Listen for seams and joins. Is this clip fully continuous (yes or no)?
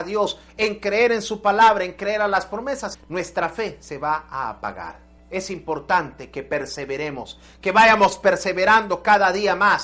no